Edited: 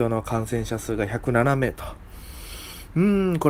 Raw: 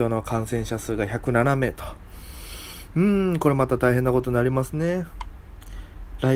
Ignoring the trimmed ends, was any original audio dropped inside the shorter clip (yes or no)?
no